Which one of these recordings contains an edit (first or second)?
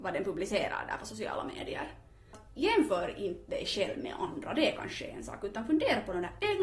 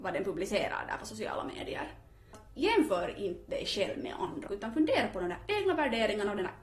second